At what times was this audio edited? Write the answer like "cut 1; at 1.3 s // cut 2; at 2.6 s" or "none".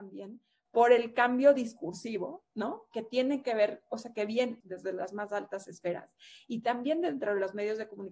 cut 1; at 4.6 s